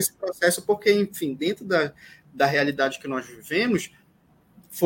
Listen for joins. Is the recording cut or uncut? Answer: uncut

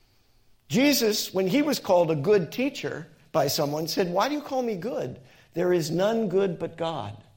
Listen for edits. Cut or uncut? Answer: uncut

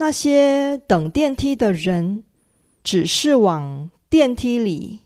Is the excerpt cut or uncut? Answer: uncut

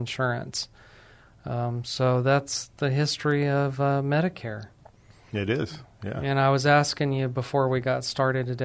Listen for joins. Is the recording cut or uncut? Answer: uncut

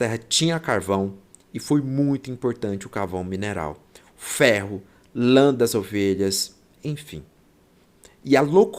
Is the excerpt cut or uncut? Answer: uncut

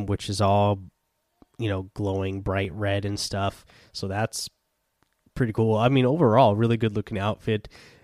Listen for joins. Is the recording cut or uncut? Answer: uncut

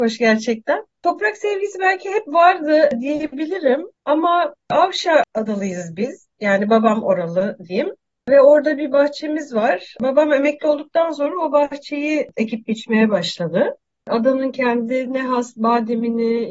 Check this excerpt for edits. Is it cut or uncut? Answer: uncut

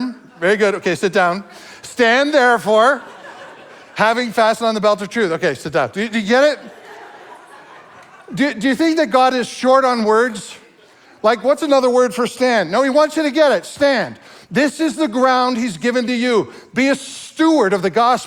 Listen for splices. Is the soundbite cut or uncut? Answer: uncut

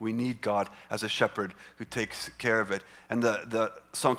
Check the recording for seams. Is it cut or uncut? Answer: uncut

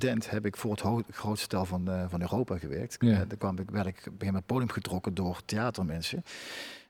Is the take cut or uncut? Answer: uncut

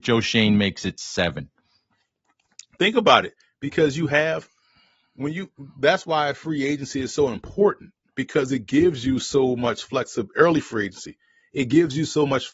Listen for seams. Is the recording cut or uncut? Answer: uncut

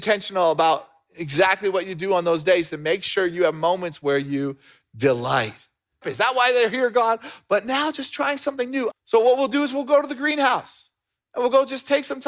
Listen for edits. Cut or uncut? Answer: cut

